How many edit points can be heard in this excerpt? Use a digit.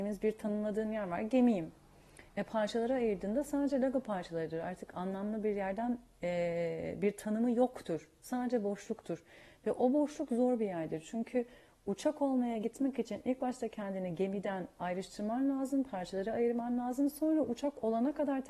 0